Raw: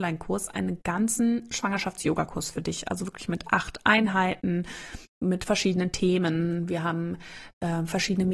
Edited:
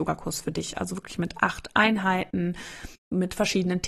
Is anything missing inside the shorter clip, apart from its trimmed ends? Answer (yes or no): no